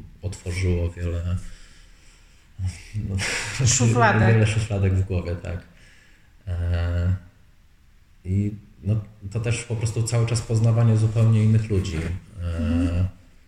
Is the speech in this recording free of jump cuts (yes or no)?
yes